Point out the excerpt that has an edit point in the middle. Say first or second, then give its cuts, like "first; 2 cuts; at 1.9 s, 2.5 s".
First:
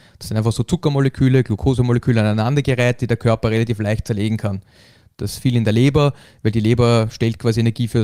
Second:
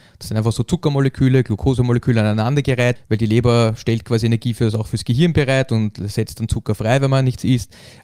second; 1 cut; at 3.0 s